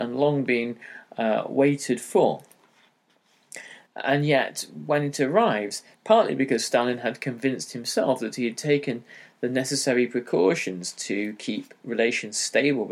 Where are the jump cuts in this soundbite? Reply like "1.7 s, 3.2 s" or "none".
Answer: 3.9 s, 5.9 s